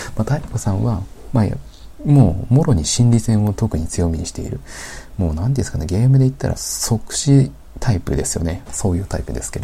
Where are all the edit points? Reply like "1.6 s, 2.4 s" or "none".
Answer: 6.6 s, 8.7 s